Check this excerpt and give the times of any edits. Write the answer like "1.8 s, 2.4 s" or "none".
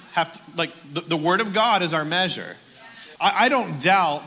3.2 s